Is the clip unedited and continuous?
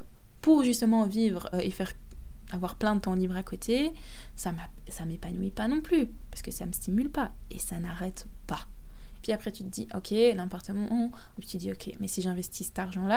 no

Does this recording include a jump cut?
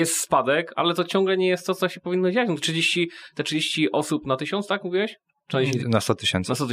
yes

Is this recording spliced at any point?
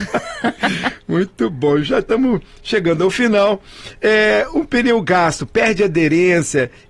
no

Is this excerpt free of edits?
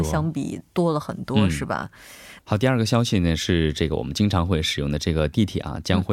no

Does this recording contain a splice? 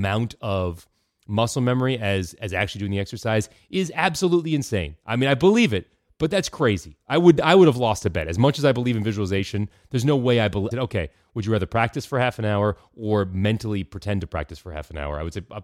yes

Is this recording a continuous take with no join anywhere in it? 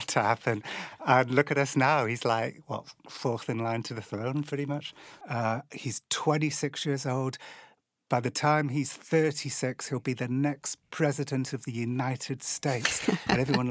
no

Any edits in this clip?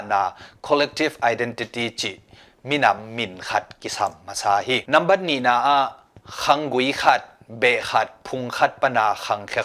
no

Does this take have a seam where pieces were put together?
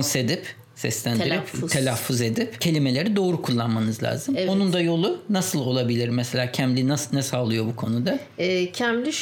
no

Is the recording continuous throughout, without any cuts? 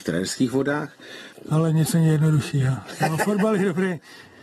no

